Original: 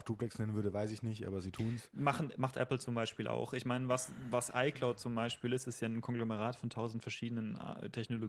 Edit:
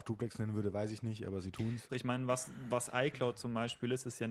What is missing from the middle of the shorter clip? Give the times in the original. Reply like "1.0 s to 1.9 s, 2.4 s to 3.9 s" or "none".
1.9 s to 3.5 s